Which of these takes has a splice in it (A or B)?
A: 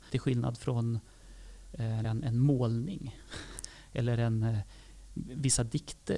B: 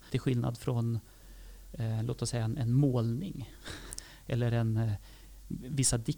A